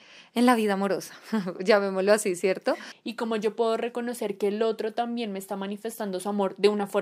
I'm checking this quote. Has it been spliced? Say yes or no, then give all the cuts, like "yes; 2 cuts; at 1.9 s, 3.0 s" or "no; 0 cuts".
yes; 1 cut; at 2.9 s